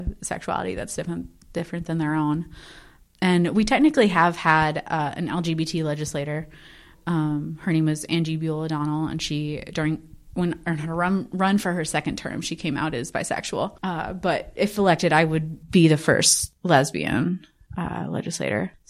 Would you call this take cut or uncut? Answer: uncut